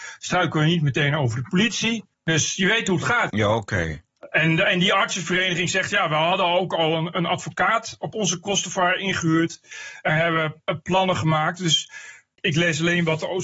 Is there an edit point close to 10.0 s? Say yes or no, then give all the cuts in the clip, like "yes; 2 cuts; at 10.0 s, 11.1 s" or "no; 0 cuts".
no; 2 cuts; at 2.1 s, 3.3 s